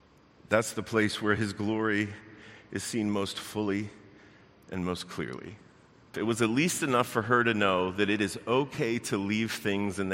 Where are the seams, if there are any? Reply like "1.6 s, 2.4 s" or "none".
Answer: 6.1 s